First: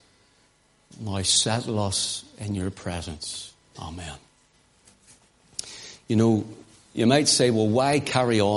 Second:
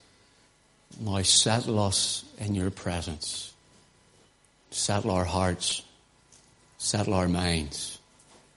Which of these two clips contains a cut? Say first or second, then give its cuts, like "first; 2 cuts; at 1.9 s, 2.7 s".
first; 1 cut; at 3.7 s